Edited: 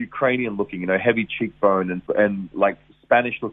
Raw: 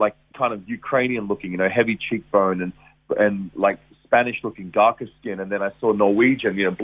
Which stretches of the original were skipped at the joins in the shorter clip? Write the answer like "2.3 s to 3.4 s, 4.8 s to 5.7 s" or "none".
2.8 s to 3.1 s